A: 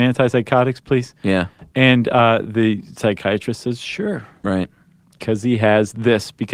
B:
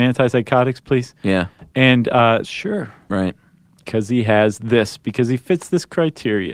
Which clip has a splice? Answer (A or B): B